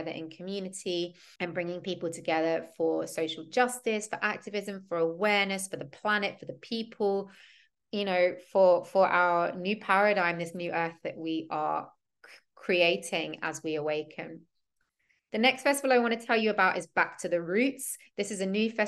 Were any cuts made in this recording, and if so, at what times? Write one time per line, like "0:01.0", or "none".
0:01.4